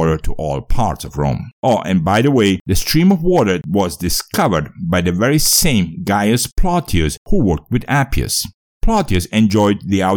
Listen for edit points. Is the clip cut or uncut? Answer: uncut